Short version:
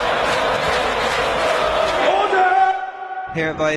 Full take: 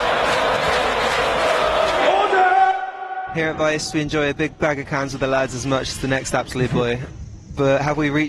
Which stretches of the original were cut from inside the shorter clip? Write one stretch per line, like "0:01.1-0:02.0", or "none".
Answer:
none